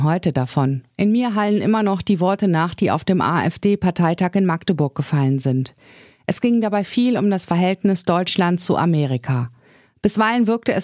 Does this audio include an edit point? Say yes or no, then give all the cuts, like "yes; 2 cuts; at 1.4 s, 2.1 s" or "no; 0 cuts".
no; 0 cuts